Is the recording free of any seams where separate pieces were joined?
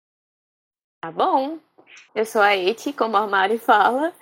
no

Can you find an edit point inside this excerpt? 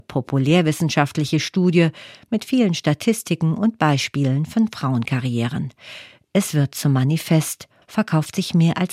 yes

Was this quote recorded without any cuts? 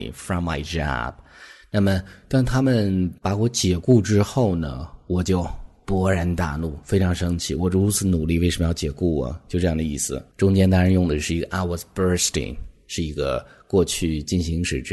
yes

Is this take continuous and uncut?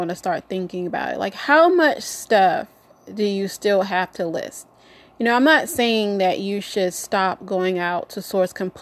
yes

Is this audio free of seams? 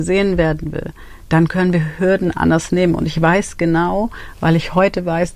yes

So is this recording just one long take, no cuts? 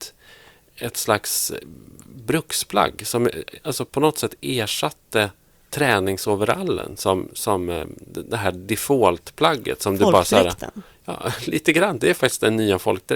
yes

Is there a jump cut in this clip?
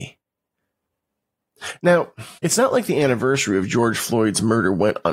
yes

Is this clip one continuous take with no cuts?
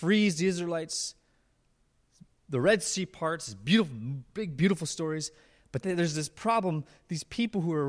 no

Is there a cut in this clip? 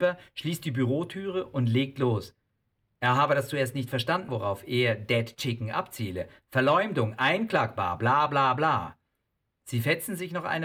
yes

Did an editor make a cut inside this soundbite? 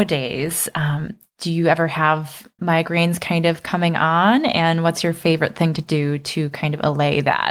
yes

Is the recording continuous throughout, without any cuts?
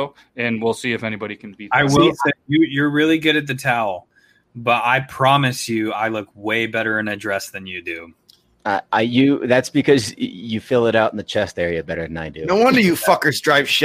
yes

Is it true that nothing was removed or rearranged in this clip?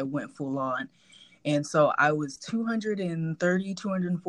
yes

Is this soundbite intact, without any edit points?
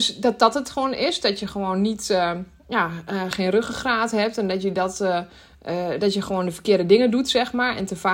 no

